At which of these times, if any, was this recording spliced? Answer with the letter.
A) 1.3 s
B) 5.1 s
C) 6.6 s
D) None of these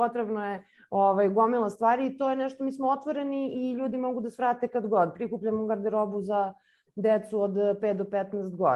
D